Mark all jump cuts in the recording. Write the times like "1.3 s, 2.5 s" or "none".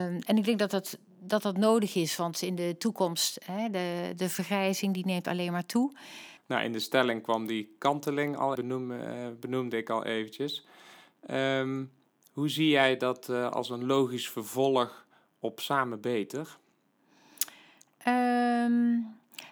6.4 s, 8.6 s